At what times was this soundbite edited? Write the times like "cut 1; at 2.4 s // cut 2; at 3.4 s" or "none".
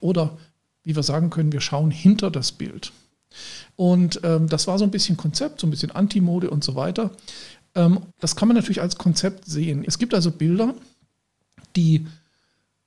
cut 1; at 3.7 s // cut 2; at 8.1 s // cut 3; at 9.8 s

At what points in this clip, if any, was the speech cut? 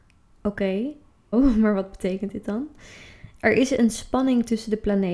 cut 1; at 1.3 s

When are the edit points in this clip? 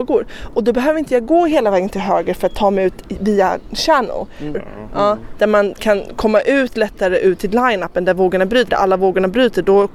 cut 1; at 4.5 s // cut 2; at 8.7 s

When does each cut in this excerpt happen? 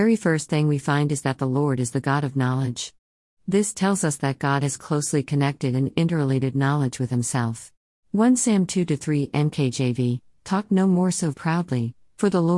cut 1; at 8.0 s // cut 2; at 11.3 s

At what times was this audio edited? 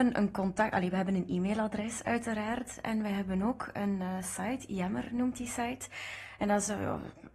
none

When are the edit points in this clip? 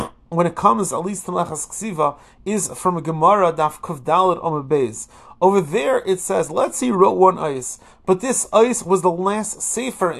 none

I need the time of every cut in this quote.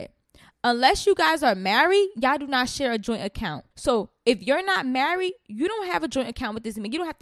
cut 1; at 3.7 s

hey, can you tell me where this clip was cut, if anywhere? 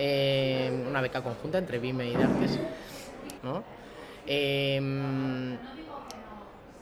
cut 1; at 3.4 s

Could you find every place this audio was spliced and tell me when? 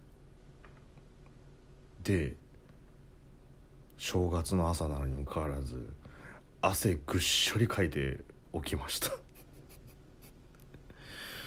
cut 1; at 5.3 s

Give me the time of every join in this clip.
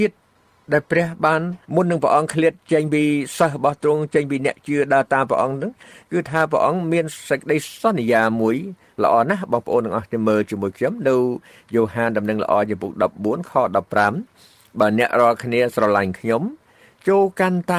cut 1; at 1.6 s

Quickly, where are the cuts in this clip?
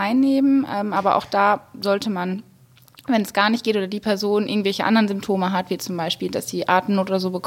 none

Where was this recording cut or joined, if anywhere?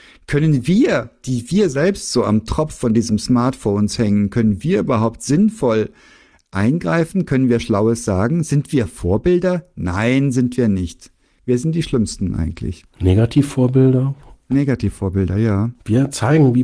none

